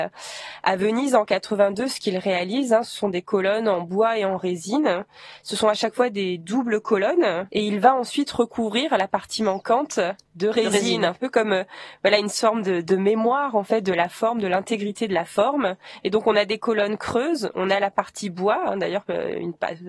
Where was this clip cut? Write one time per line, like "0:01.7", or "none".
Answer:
0:07.5